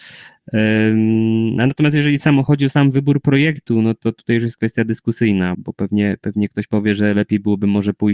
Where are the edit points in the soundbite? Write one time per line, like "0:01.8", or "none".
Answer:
0:05.5